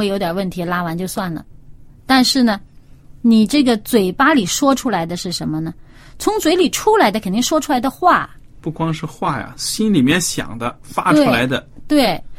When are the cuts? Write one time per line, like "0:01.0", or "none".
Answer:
none